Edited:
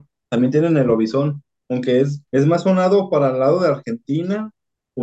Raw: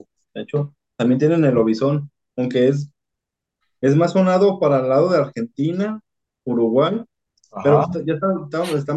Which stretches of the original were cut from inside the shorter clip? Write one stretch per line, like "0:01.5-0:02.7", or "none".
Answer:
0:02.9-0:03.8